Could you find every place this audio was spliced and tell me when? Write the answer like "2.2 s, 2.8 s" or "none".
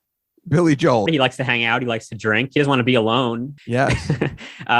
1.1 s, 3.6 s